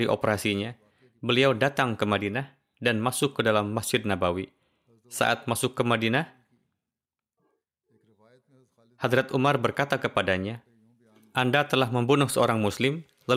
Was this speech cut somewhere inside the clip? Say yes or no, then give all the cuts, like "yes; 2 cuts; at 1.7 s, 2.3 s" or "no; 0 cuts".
no; 0 cuts